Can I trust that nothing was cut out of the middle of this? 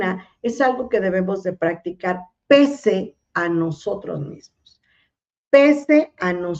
yes; 0 cuts

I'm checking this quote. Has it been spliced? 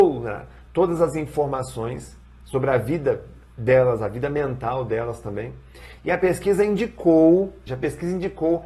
yes; 1 cut; at 7.7 s

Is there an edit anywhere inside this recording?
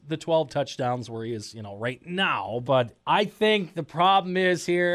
yes; 1 cut; at 2.6 s

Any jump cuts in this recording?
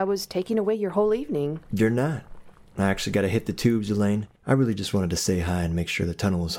yes; 1 cut; at 4.4 s

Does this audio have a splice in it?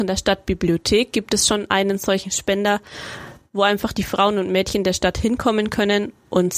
no; 0 cuts

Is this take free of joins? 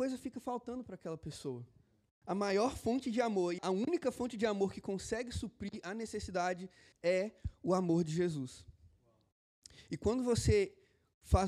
no; 3 cuts; at 2.2 s, 3.6 s, 6.9 s

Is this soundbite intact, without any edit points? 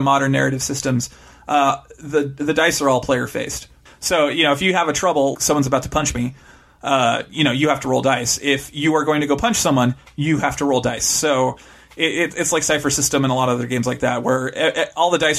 no; 2 cuts; at 3.9 s, 5.3 s

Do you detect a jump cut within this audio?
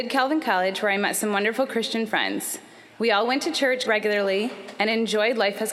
yes; 1 cut; at 3.8 s

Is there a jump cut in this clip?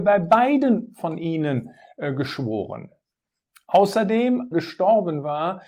yes; 1 cut; at 4.5 s

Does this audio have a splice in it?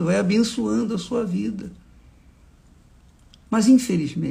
no; 0 cuts

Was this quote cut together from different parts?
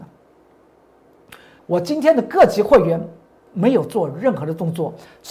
yes; 1 cut; at 1.6 s

